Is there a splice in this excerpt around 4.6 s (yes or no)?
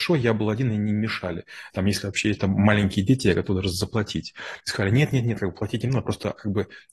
no